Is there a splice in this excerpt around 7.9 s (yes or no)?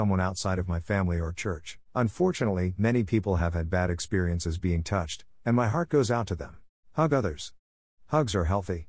no